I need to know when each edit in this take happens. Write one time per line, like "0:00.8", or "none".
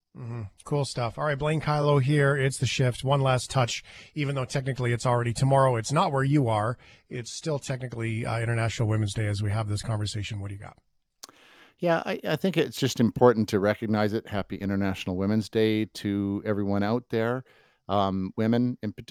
none